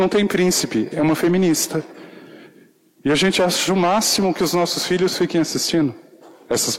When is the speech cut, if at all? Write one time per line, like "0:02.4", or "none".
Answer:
0:00.9